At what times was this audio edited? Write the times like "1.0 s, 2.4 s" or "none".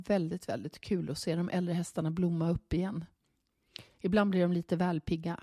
none